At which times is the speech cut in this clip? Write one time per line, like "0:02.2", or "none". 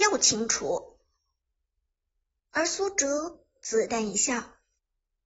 0:03.9